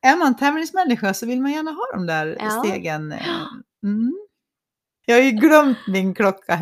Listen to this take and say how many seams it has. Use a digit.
1